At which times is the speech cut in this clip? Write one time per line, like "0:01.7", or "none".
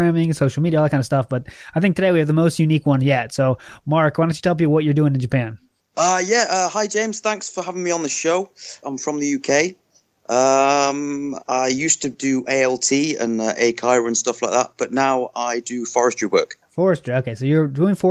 0:08.8
0:11.4